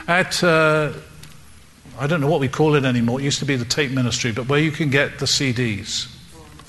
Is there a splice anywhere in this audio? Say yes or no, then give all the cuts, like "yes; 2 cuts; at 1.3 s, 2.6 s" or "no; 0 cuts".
no; 0 cuts